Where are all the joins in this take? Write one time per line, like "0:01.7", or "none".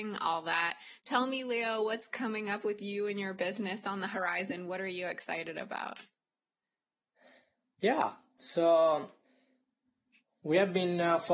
none